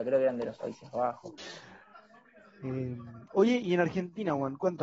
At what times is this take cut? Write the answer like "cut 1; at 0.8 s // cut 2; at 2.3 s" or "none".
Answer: cut 1; at 1.4 s